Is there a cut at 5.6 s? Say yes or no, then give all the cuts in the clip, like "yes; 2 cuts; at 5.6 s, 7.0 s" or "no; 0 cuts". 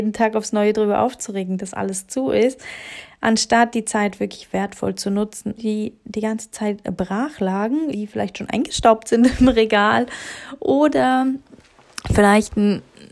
yes; 2 cuts; at 5.6 s, 7.9 s